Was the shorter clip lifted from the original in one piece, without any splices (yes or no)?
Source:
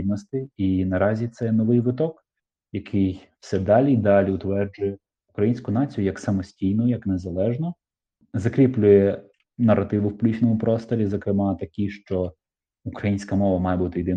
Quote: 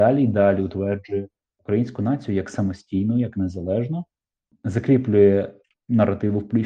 yes